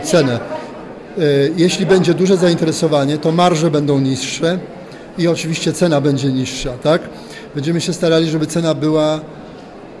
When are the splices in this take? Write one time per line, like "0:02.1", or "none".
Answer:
none